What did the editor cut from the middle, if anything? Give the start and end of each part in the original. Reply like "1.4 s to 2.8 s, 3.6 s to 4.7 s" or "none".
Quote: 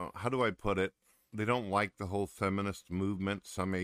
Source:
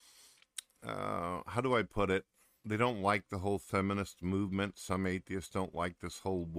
none